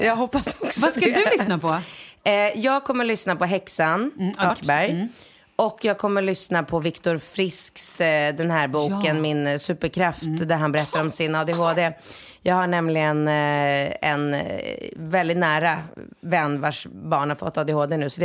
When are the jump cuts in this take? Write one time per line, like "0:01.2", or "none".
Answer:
0:04.5